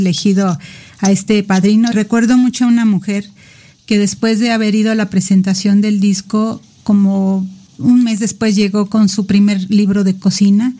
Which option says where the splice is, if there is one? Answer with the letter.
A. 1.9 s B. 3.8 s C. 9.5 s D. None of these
A